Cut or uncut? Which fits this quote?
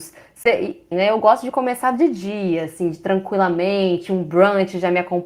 cut